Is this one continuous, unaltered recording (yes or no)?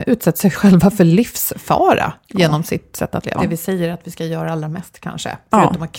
no